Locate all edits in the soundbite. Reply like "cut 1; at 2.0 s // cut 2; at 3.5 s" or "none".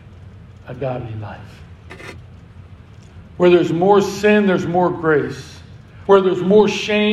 cut 1; at 6.1 s